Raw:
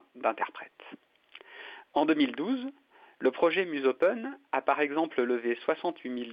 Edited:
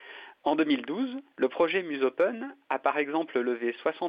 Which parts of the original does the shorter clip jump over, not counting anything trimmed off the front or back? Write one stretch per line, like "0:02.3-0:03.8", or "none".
0:02.8-0:03.1

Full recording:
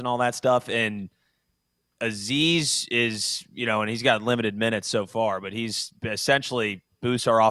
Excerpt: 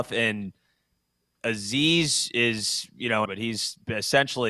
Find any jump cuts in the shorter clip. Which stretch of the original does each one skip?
0:03.8-0:05.4

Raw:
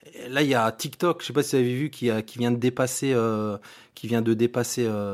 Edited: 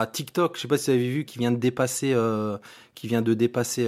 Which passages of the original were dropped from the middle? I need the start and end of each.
0:01.9-0:02.2

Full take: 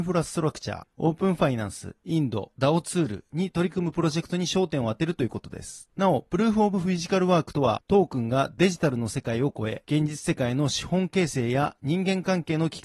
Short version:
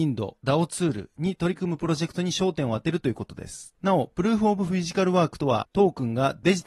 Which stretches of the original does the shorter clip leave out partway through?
none

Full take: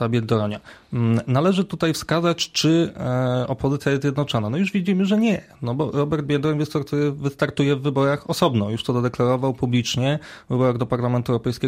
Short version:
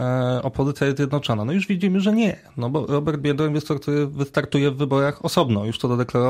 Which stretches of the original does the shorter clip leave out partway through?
none

